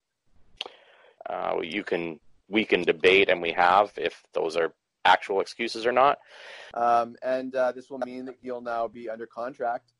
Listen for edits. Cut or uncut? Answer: cut